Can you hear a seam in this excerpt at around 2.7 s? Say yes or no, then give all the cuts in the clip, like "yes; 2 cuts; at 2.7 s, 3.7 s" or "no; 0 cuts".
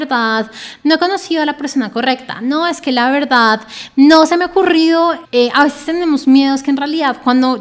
no; 1 cut; at 5.2 s